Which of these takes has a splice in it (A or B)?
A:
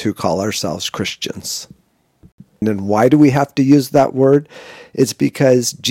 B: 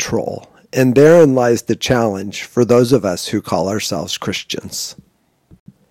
A